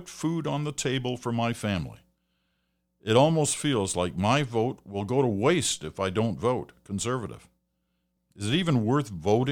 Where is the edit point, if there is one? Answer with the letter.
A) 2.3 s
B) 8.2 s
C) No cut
B